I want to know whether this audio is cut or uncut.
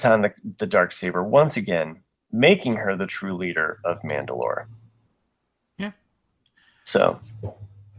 uncut